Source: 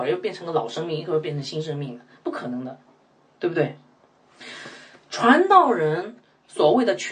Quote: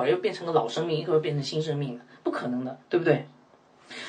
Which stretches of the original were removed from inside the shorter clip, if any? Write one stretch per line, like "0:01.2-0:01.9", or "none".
0:02.8-0:03.3